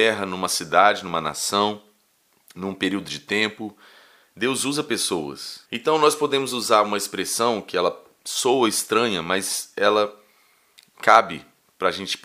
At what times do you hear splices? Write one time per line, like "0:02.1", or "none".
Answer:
0:04.3
0:05.7